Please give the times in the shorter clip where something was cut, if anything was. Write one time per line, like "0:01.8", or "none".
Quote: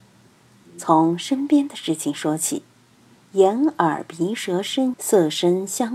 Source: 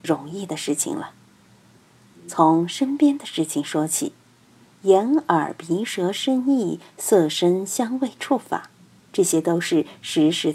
0:04.9